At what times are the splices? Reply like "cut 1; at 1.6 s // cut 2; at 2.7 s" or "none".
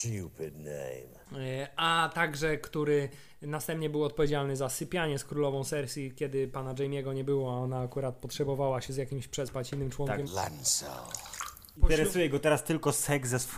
cut 1; at 10.3 s // cut 2; at 11.8 s